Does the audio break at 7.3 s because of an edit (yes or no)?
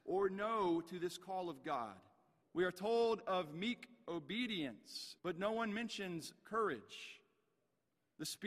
no